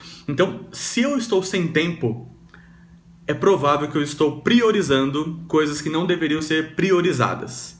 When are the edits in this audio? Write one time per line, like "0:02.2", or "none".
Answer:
none